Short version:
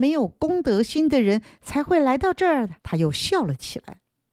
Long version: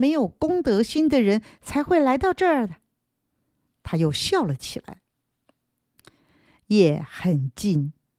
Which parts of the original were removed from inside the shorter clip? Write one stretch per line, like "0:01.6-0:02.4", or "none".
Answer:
0:02.8-0:03.8